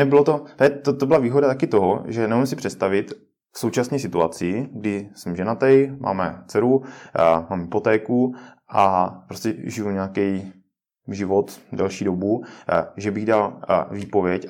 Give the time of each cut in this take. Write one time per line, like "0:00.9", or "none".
none